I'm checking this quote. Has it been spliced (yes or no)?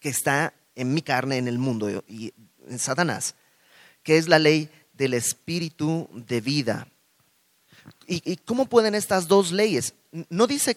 no